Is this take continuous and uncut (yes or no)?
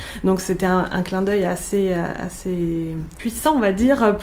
yes